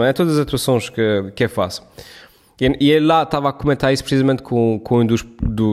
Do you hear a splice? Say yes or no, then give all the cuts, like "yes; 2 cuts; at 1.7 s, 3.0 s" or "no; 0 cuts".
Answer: no; 0 cuts